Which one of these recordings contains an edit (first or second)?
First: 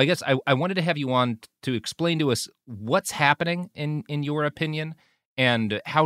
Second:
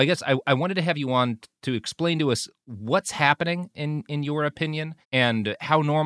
second